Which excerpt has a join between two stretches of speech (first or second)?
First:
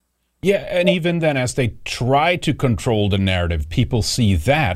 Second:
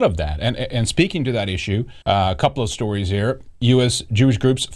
second